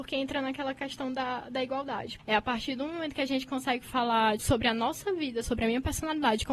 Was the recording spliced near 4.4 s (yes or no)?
yes